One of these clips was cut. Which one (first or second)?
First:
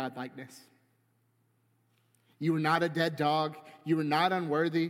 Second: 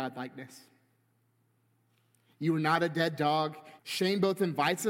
second